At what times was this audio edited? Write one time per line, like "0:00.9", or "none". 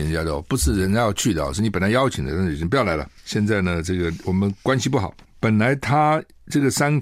0:03.2

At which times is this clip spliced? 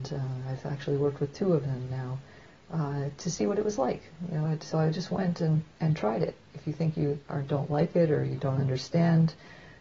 none

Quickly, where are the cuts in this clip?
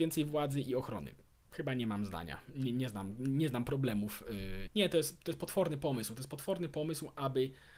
0:04.7

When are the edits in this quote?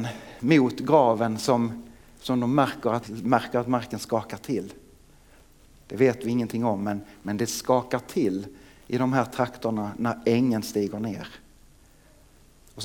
0:03.0

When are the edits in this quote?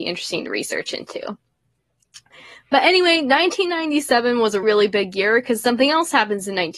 0:04.6

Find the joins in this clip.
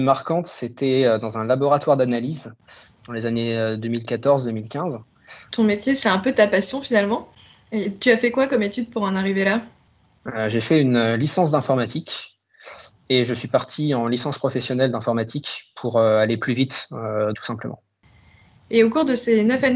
0:05.5
0:17.3

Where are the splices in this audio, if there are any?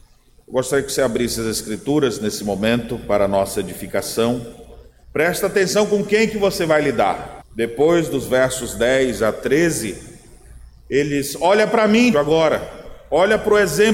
0:05.0
0:07.4
0:12.1

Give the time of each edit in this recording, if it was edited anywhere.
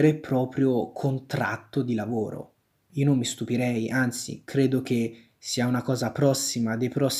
0:02.9

